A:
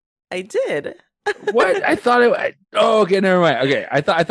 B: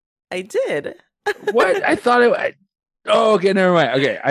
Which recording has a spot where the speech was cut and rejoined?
A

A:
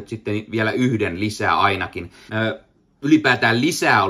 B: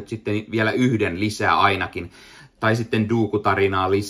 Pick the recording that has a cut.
A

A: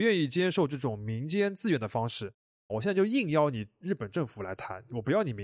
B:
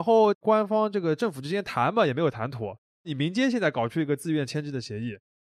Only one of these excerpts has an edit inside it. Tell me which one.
A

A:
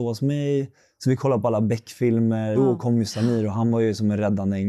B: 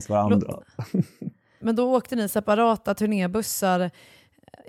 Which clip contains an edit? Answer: A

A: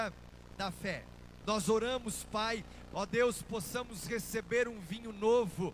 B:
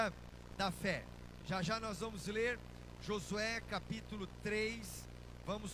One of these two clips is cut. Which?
A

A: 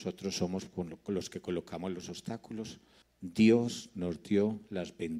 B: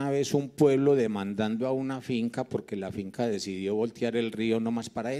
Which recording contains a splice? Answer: A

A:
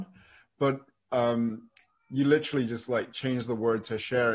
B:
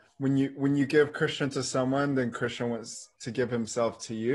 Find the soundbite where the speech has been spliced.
B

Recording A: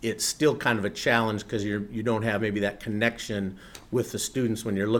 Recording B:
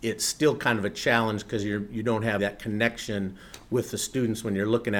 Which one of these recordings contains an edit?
B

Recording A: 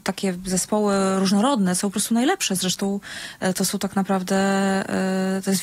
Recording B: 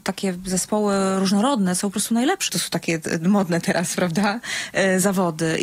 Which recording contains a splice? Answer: B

